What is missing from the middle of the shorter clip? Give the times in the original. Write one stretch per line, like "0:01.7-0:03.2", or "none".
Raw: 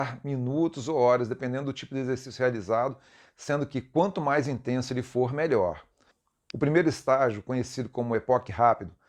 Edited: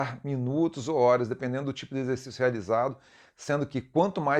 none

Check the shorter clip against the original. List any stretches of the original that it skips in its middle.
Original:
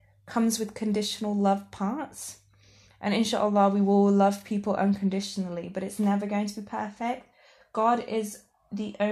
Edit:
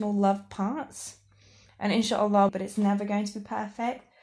0:03.7-0:05.7

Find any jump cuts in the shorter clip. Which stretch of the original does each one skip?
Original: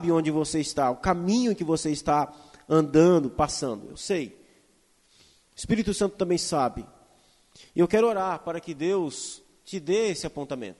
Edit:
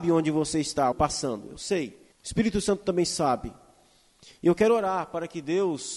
0:00.9-0:03.3
0:04.5-0:05.4

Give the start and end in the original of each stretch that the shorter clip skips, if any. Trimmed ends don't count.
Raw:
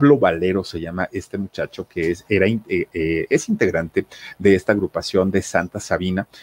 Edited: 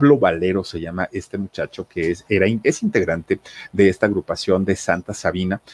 0:02.6-0:03.3

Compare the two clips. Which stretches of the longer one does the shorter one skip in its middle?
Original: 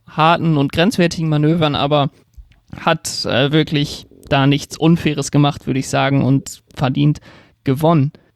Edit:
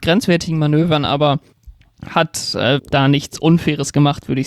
0:03.5-0:04.2

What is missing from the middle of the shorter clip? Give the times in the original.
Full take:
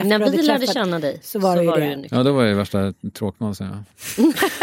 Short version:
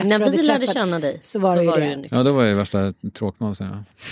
none

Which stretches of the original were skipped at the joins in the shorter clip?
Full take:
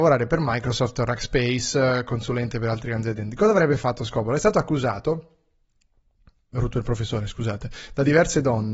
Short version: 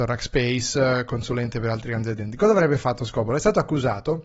none

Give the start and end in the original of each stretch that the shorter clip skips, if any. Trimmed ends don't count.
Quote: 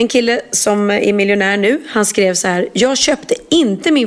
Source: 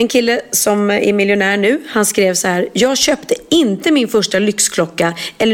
none

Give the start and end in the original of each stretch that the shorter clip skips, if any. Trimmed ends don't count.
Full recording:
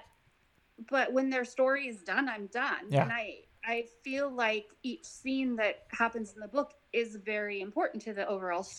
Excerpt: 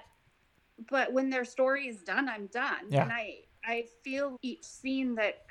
0:04.4-0:04.8

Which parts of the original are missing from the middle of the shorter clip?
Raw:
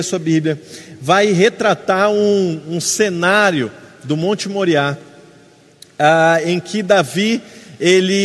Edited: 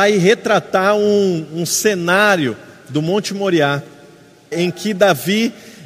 0:05.7-0:06.4

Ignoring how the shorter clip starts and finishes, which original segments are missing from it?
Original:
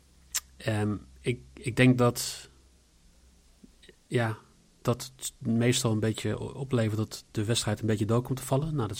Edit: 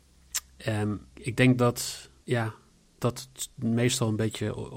0:01.1-0:01.5
0:02.6-0:04.0

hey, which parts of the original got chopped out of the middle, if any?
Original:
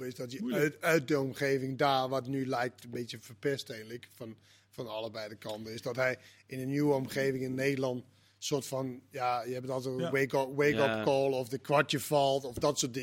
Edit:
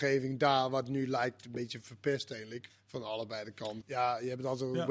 0:04.1-0:04.5
0:05.6-0:09.0

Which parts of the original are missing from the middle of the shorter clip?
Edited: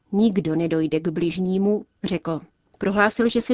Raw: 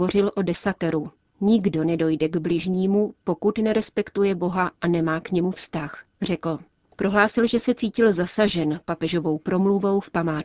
0:03.2-0:06.1

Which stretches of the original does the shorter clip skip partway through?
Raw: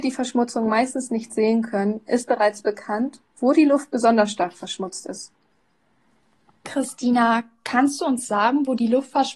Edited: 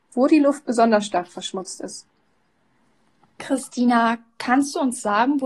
none

